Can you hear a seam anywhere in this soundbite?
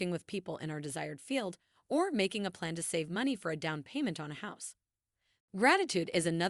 yes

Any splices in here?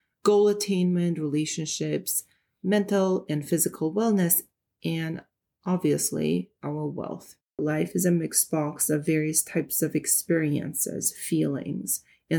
yes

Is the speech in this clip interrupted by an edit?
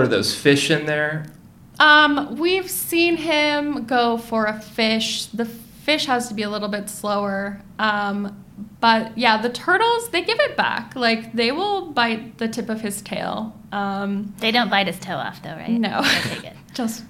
no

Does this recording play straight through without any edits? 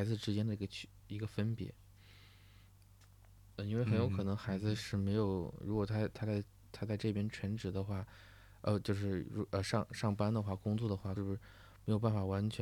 no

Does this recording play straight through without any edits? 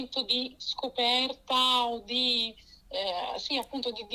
yes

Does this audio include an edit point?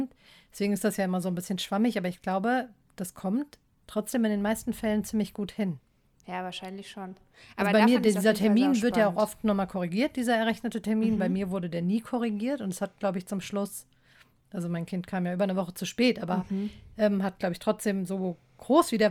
no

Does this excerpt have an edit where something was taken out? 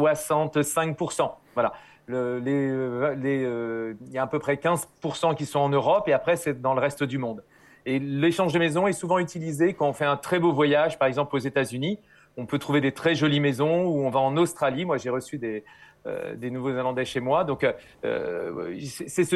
no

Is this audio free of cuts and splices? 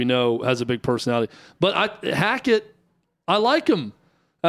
yes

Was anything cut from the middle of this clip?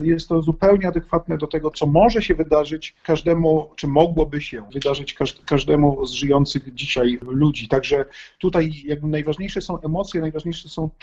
yes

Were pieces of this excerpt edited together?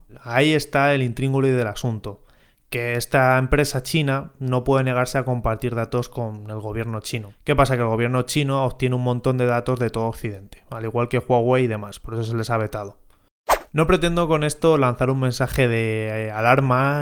no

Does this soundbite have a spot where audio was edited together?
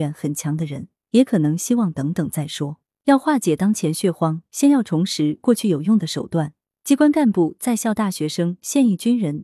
no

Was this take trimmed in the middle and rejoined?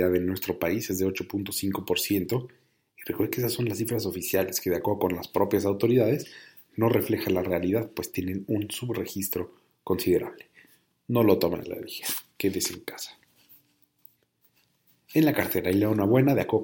no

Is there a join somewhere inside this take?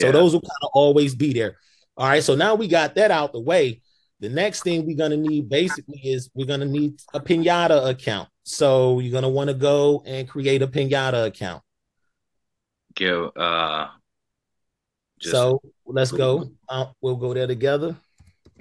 no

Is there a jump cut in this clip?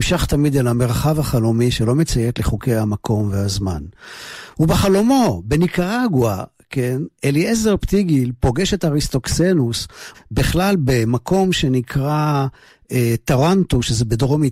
yes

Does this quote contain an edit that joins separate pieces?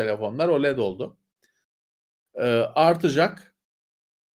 no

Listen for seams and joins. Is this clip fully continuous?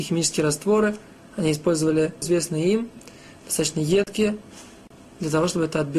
no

